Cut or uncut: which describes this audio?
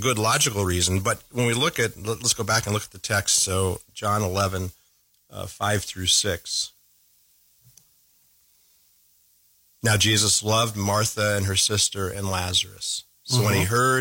uncut